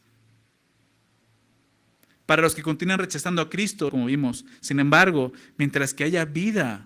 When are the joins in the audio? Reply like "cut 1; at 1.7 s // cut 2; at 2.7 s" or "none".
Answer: cut 1; at 3.9 s

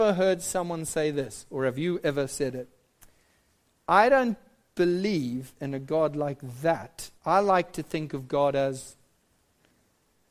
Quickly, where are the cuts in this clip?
cut 1; at 7.2 s

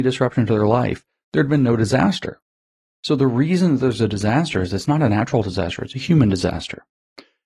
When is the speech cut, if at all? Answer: none

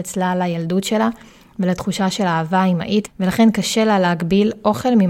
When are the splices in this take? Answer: cut 1; at 3.0 s

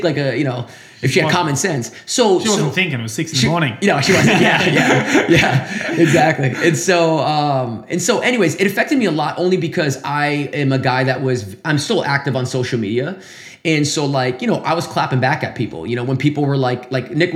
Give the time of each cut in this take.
none

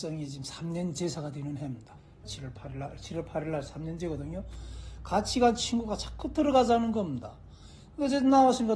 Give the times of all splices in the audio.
cut 1; at 2.2 s

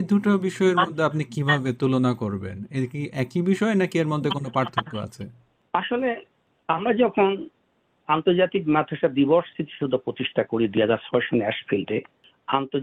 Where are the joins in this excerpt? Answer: none

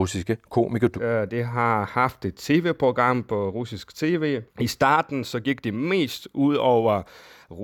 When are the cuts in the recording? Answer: cut 1; at 1.0 s // cut 2; at 4.5 s

